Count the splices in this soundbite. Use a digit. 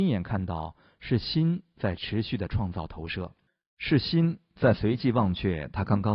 0